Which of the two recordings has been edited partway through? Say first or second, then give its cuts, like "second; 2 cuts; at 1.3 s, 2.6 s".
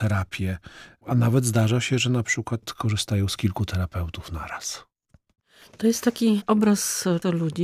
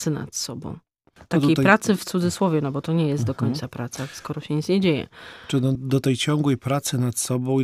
second; 1 cut; at 5.7 s